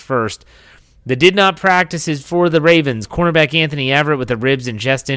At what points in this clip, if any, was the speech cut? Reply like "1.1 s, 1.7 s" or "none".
none